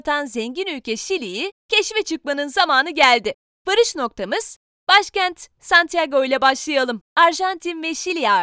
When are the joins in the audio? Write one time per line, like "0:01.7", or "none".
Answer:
0:07.1